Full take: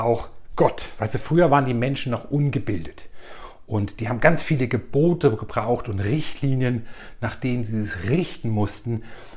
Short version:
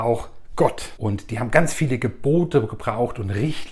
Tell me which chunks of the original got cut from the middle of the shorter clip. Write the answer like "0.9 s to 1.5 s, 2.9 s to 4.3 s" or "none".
1.0 s to 3.7 s